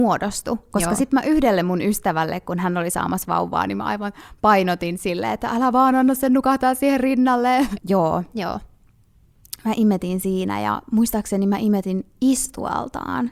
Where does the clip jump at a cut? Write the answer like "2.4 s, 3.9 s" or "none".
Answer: 7.8 s